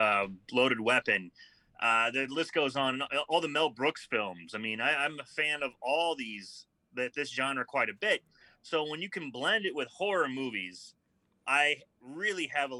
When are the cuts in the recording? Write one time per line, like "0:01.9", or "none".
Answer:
none

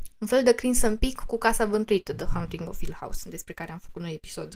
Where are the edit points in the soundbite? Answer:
none

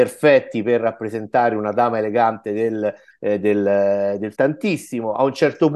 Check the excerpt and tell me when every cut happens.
0:03.1
0:04.3

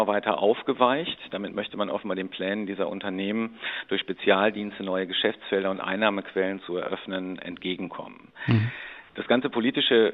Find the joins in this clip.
none

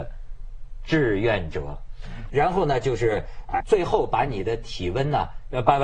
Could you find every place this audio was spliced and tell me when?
0:02.3
0:03.6

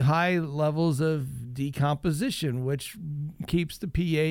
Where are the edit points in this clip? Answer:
none

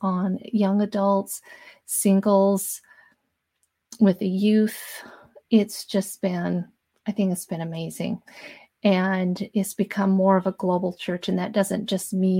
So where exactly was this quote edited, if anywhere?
none

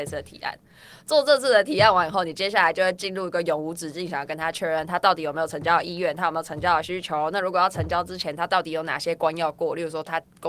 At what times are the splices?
none

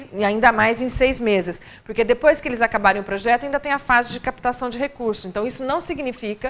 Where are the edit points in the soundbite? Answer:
none

